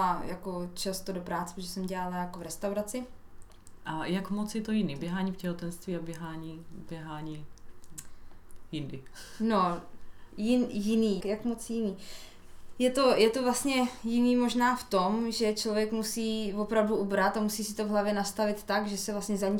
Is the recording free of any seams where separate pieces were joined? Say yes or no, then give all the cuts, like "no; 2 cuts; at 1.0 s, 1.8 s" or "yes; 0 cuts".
no; 2 cuts; at 3.8 s, 11.2 s